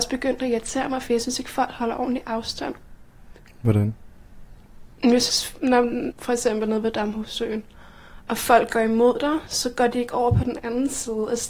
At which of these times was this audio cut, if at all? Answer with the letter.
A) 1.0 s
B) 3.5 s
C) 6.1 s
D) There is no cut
C